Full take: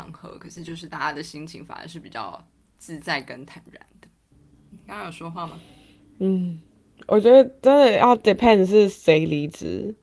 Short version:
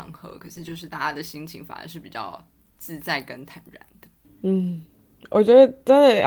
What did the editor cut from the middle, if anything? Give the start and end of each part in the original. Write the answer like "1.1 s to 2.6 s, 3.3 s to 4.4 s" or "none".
4.2 s to 6.0 s